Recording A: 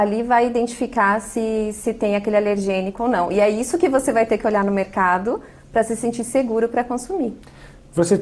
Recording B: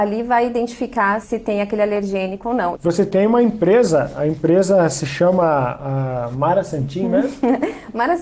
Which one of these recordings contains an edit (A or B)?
B